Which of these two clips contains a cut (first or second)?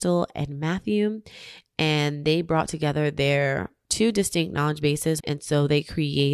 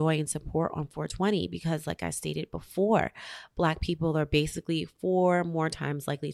first